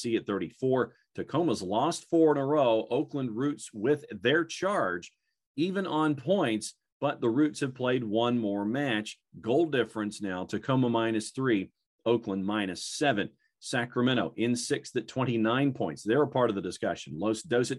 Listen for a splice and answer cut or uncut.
uncut